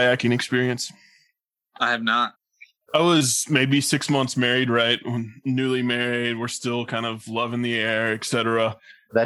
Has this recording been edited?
yes; 1 cut; at 2.8 s

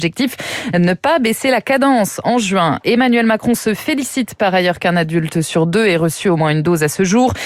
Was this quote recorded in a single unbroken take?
yes; 0 cuts

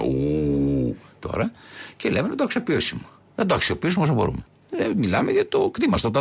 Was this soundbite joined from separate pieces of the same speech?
no; 0 cuts

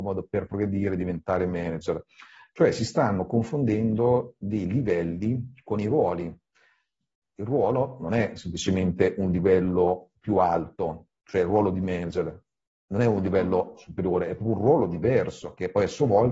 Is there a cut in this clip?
no; 0 cuts

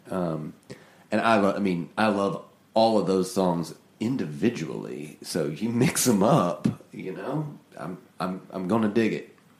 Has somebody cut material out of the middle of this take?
no; 0 cuts

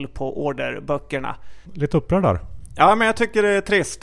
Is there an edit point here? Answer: yes; 1 cut; at 1.7 s

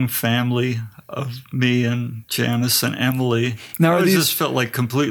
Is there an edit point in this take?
no; 0 cuts

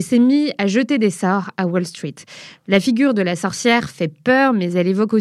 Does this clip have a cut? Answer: no; 0 cuts

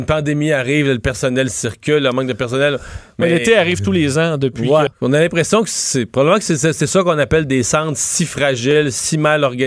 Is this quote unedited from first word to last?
no; 1 cut; at 4.9 s

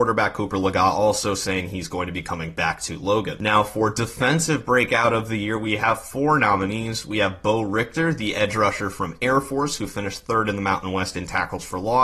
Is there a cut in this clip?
no; 0 cuts

